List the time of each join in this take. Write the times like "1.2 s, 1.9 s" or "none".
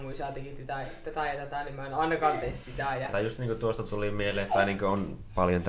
3.1 s, 4.5 s